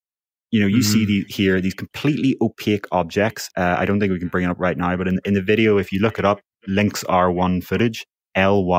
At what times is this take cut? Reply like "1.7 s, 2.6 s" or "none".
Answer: 3.5 s